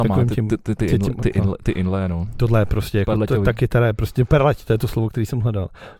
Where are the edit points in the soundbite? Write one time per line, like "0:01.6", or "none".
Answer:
none